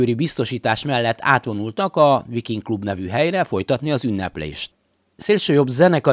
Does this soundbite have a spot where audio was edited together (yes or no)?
no